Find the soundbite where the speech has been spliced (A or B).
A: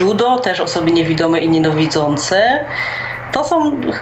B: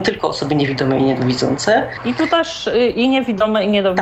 B